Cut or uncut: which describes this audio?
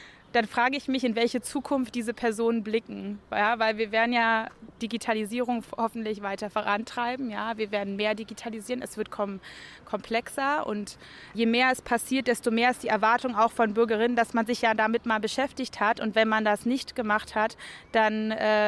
uncut